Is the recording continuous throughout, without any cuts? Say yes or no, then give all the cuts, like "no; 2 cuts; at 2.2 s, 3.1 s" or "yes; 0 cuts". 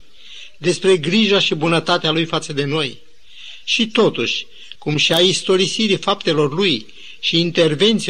no; 1 cut; at 4.8 s